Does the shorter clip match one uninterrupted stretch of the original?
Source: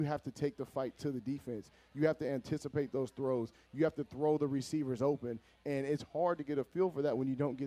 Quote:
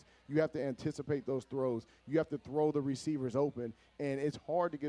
yes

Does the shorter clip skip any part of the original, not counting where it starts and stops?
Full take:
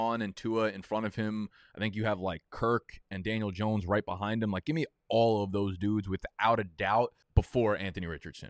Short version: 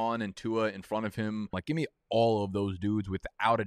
yes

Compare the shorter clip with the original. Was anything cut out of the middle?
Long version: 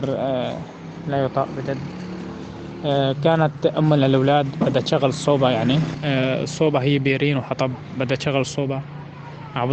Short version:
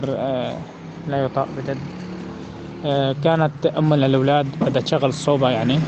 no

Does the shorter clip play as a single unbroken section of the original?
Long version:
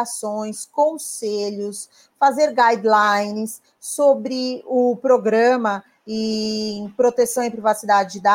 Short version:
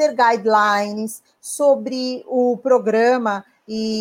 yes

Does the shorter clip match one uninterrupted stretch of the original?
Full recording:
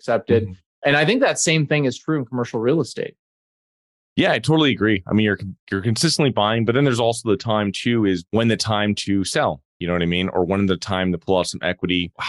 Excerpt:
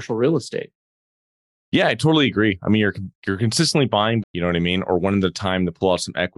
no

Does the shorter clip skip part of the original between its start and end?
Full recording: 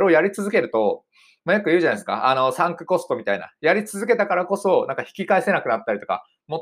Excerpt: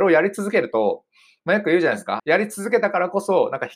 yes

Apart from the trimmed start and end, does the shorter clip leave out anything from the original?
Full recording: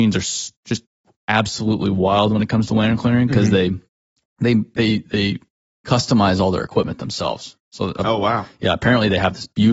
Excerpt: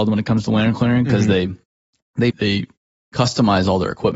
yes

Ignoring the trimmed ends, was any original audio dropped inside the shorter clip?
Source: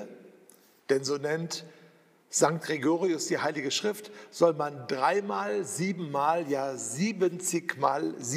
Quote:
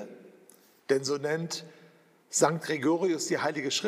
no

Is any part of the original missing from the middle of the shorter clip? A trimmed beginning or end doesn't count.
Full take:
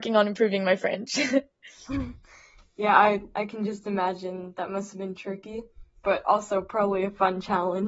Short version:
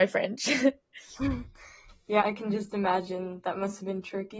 yes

